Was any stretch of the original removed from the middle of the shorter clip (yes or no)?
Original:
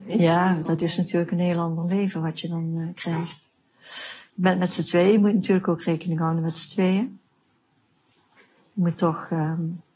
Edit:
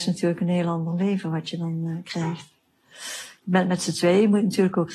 no